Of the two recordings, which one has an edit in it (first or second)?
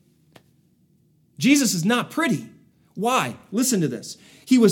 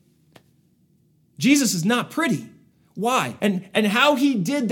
second